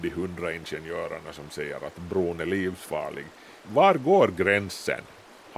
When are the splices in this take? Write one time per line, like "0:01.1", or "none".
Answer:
0:03.6